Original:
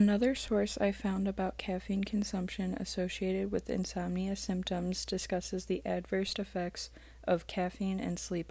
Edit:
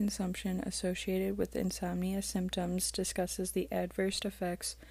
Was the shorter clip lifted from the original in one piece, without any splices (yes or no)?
yes